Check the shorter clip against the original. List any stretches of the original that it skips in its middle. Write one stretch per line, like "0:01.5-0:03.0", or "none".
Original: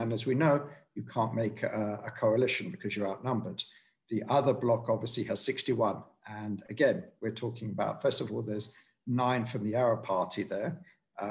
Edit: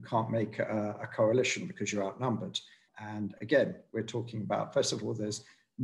0:03.9-0:06.2